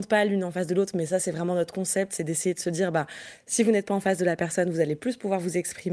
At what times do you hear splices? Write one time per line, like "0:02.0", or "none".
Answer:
none